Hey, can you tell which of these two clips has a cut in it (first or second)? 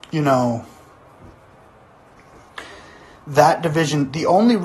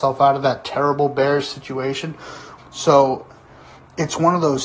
second